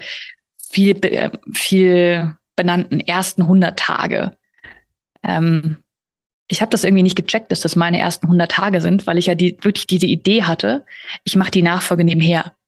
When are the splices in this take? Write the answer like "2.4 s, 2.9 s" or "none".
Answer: none

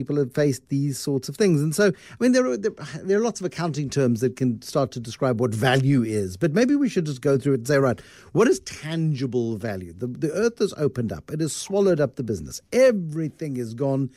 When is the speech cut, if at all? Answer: none

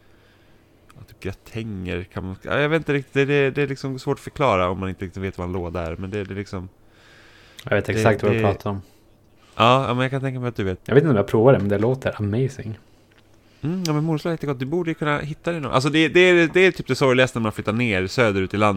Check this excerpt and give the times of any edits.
1.1 s, 10.8 s

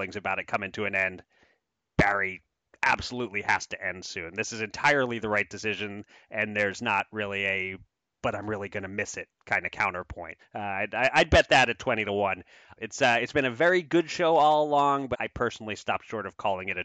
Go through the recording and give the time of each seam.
10.4 s, 12.8 s, 15.1 s

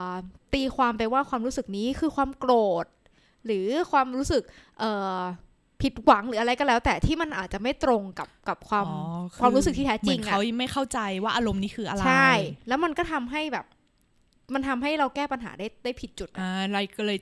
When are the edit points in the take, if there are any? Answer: none

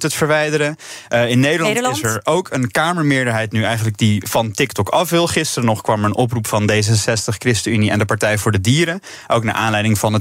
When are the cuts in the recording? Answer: none

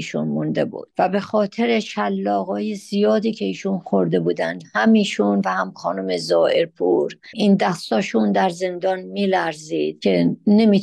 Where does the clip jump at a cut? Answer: none

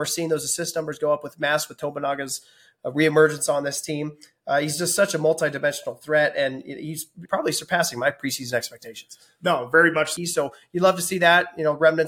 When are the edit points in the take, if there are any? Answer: 7.3 s, 10.2 s

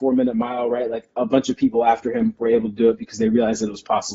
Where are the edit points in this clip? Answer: none

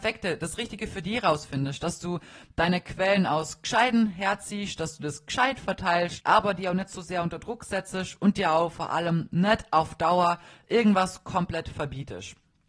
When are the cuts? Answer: 6.2 s

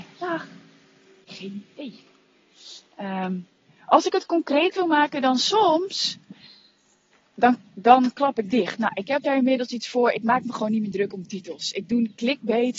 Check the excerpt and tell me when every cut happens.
none

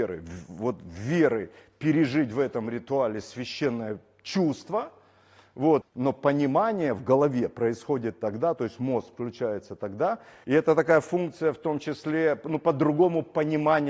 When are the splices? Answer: 5.8 s, 10.4 s

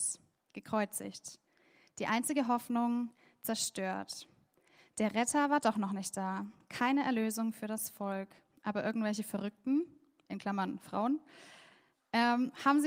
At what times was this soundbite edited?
none

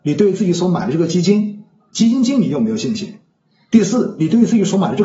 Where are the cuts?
none

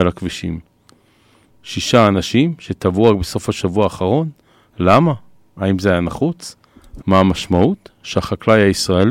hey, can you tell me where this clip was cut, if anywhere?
1.5 s, 7.0 s

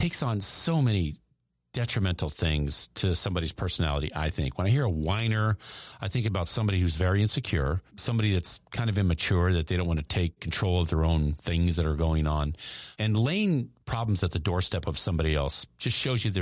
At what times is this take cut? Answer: 7.9 s

